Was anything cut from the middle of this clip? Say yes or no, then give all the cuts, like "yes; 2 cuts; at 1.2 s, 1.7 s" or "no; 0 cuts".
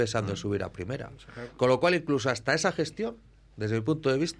no; 0 cuts